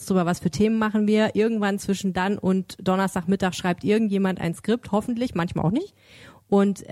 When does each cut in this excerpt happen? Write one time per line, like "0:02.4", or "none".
none